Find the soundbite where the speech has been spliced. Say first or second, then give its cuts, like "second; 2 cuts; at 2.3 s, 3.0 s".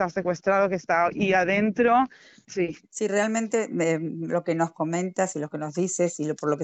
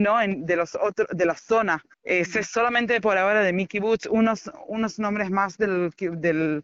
first; 1 cut; at 2.8 s